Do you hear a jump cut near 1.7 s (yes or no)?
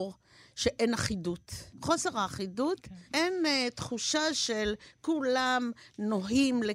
yes